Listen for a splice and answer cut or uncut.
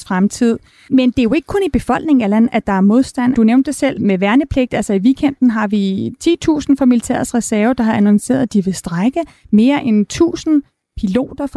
uncut